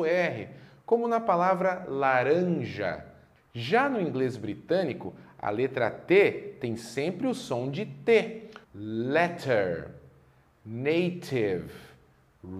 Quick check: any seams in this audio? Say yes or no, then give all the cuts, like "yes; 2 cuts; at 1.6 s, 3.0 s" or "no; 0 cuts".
yes; 2 cuts; at 3.4 s, 8.6 s